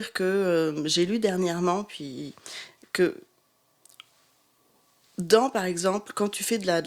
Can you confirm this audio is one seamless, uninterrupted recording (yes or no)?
yes